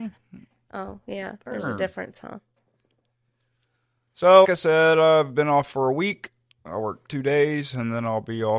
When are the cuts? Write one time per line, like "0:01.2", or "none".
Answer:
0:04.4